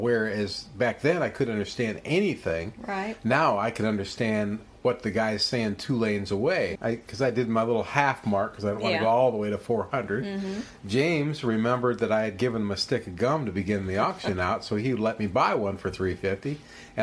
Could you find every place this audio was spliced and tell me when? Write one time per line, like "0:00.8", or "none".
0:06.8